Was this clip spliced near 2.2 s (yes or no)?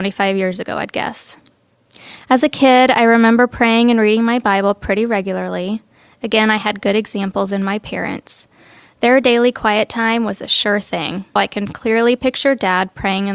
no